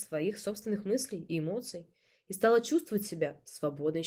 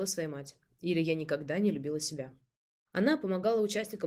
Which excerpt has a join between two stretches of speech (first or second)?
second